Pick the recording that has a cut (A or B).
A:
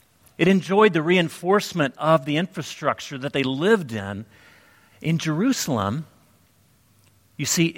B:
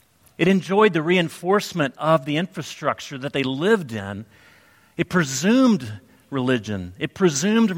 A